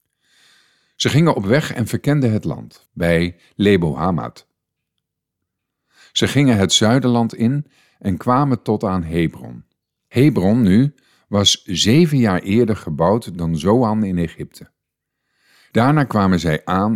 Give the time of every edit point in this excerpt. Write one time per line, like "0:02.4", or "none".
0:02.9
0:10.0

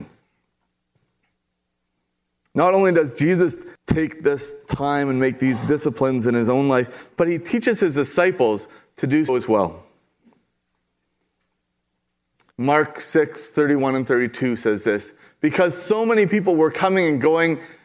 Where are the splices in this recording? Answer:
0:09.3

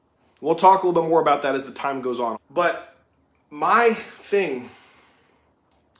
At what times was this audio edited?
0:02.3

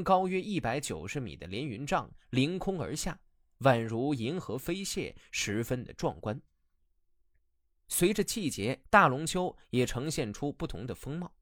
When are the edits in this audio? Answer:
0:08.8

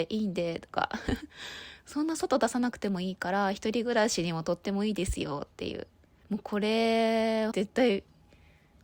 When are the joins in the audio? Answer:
0:06.2
0:07.5

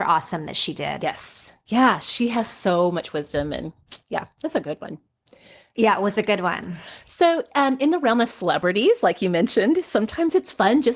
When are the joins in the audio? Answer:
none

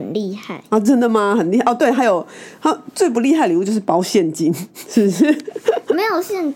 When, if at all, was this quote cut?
none

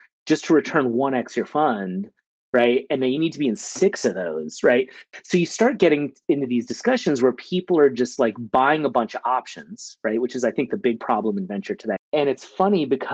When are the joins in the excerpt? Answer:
0:12.0

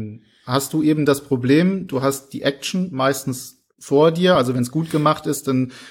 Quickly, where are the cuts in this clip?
none

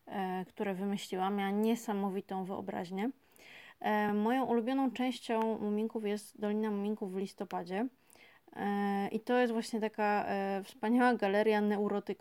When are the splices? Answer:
none

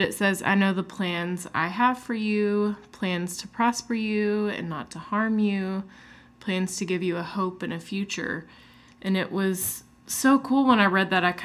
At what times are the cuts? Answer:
none

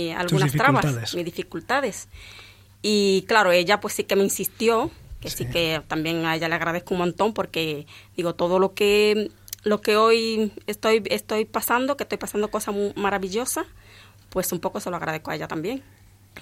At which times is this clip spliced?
none

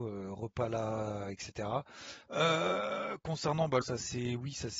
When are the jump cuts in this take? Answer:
0:02.3
0:03.8

